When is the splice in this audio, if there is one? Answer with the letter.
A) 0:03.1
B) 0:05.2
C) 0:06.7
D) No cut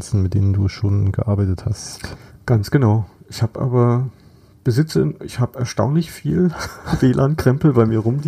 B